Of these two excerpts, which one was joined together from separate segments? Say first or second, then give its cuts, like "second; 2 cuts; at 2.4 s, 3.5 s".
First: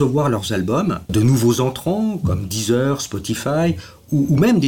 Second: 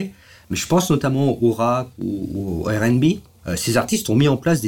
first; 1 cut; at 1.1 s